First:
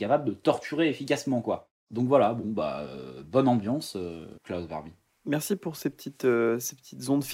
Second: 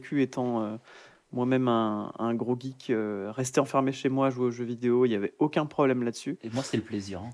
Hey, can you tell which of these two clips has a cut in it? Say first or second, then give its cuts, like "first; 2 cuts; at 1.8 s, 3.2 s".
first; 1 cut; at 4.4 s